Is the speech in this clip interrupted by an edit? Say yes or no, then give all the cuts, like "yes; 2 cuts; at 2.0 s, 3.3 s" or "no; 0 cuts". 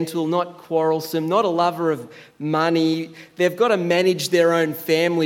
no; 0 cuts